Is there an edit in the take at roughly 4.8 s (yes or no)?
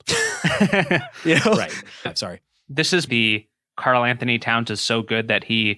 no